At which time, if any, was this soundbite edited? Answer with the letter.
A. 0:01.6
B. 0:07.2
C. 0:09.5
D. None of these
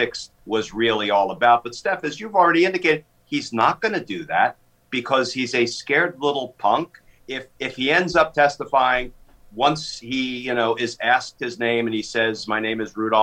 B